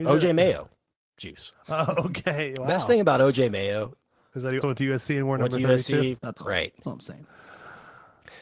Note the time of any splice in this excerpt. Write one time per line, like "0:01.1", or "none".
0:04.6
0:06.2